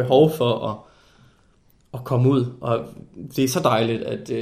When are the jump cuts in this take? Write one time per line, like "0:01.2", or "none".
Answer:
none

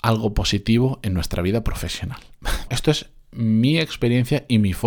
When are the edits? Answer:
0:02.7

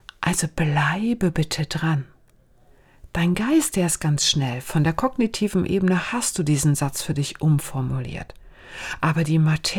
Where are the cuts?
none

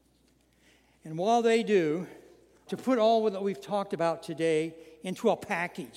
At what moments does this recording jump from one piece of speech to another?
0:02.7

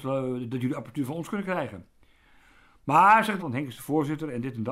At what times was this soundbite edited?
0:03.4

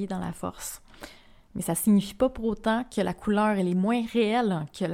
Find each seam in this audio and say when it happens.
none

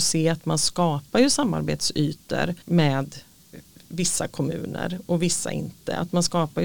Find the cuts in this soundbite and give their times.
0:02.6

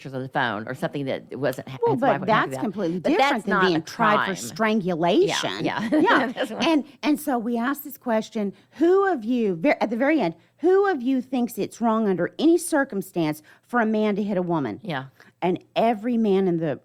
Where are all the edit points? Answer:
none

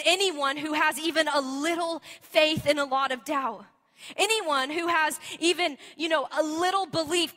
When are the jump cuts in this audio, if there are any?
none

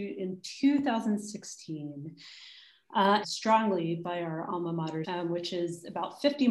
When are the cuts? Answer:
0:03.2
0:05.0

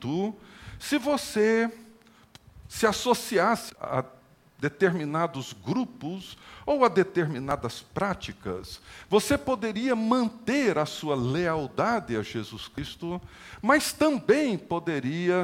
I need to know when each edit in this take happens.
0:03.7

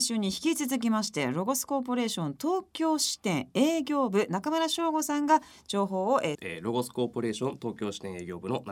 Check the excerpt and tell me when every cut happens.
0:06.3

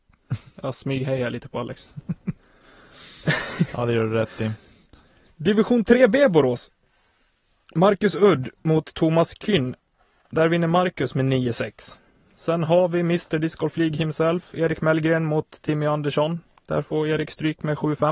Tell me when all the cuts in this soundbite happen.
none

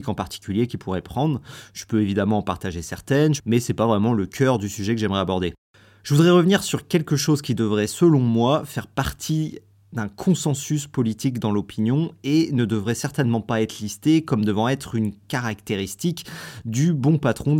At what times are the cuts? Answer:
0:03.4

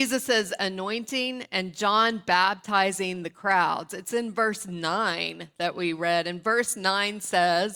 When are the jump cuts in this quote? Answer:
none

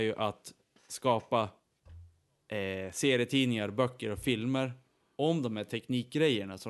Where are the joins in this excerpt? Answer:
none

